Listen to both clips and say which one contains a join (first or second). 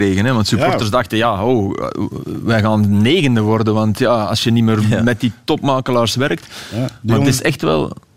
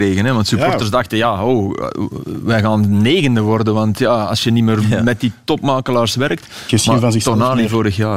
second